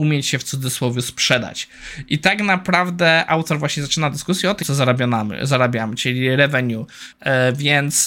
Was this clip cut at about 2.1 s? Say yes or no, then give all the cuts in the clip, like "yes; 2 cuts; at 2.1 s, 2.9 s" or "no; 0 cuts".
no; 2 cuts; at 4.6 s, 7.1 s